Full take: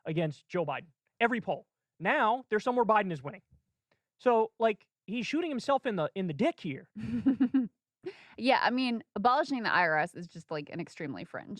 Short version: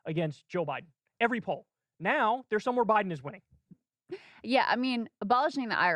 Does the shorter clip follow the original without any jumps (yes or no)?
no